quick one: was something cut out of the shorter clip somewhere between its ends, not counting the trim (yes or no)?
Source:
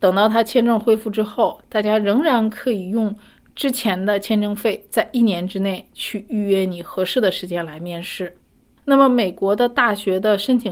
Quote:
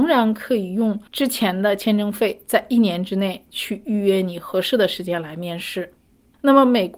yes